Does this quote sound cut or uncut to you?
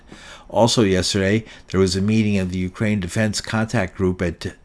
uncut